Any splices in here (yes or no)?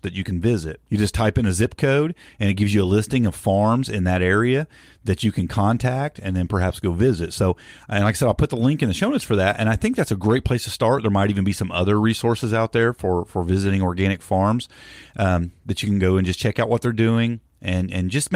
no